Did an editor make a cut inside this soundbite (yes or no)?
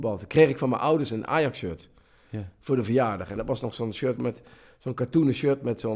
yes